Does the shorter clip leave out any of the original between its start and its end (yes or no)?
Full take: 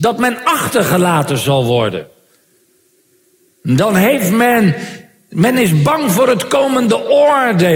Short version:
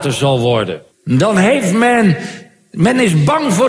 yes